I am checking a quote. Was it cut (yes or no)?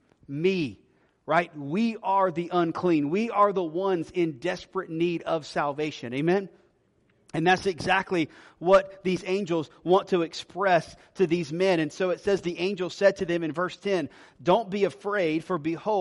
no